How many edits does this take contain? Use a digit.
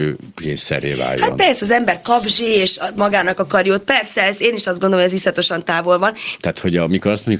1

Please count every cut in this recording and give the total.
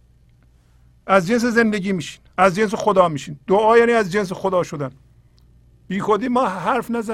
1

